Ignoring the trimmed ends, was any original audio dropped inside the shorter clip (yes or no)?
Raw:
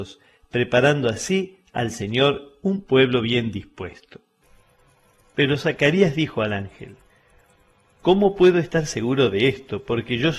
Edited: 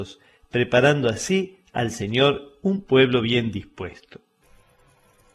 no